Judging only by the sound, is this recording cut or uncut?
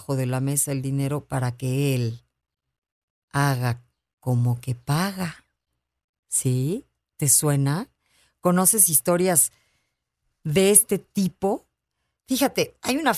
uncut